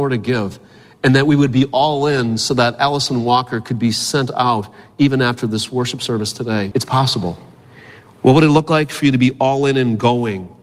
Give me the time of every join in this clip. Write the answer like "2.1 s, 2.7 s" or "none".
6.7 s